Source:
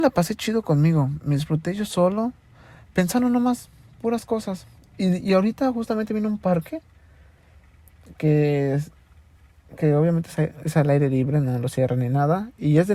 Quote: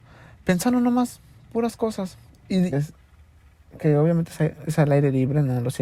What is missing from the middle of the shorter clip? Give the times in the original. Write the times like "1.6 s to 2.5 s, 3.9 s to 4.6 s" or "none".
5.2 s to 8.7 s

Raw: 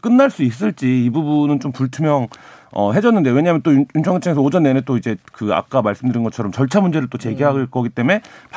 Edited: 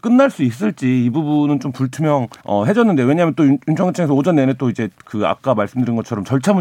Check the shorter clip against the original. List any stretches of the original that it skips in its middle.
2.4 s to 2.7 s

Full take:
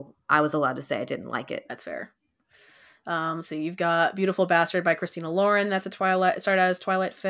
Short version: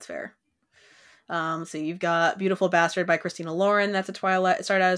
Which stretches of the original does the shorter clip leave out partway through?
none

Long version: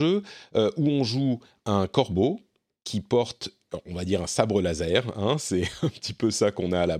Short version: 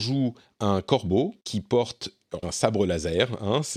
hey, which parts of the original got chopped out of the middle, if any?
2.5 s to 2.8 s, 3.8 s to 4.2 s

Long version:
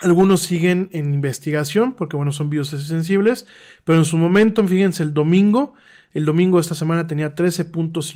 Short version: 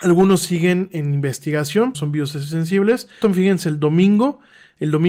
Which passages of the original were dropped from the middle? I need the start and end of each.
1.9 s to 2.3 s, 3.6 s to 4.6 s

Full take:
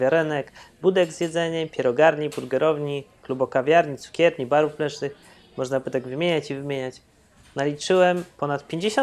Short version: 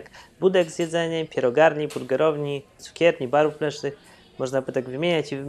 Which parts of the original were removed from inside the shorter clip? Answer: 3.2 s to 4.0 s

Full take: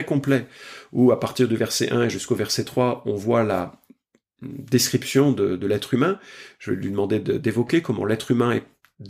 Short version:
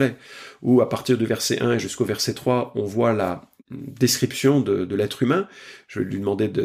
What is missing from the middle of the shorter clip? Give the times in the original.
3.9 s to 4.3 s

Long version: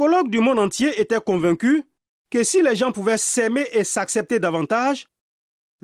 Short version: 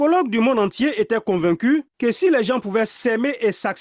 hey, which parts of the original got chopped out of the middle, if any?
1.9 s to 2.2 s

